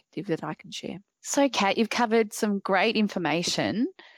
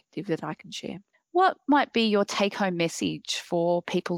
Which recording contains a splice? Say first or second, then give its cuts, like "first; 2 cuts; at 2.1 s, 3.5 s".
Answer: second; 1 cut; at 1.1 s